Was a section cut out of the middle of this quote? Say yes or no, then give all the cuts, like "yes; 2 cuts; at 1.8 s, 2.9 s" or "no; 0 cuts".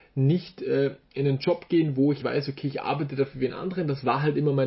yes; 1 cut; at 2.2 s